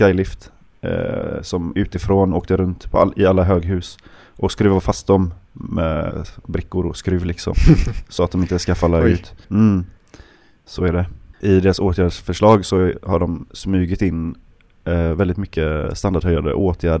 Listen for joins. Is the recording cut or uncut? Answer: cut